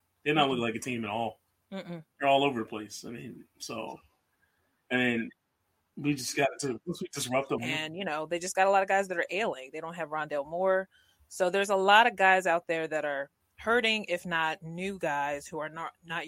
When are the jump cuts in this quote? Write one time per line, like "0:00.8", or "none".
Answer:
0:07.6